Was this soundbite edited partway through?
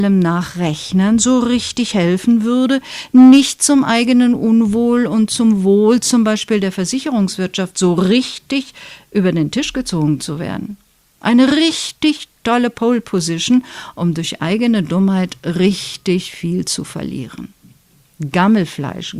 no; 0 cuts

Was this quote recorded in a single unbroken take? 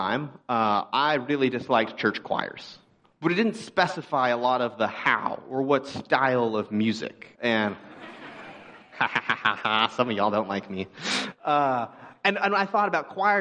no; 2 cuts; at 3.0 s, 7.3 s

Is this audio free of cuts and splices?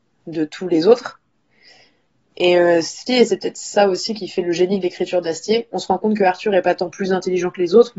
no; 1 cut; at 3.1 s

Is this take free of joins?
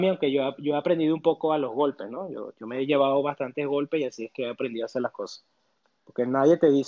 yes; 0 cuts

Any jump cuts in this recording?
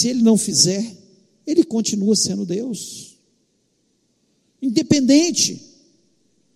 no; 0 cuts

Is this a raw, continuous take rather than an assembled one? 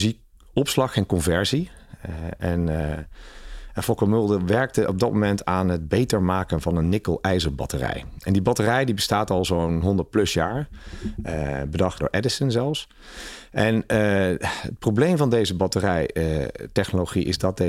no; 1 cut; at 12.0 s

